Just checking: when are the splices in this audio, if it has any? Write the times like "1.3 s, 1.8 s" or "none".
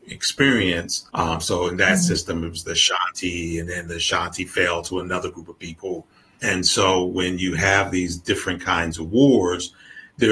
1.1 s